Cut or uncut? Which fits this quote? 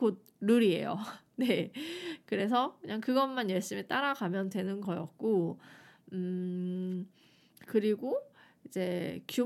uncut